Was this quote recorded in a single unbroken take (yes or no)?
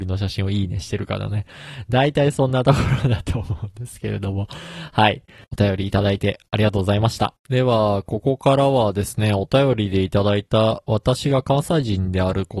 no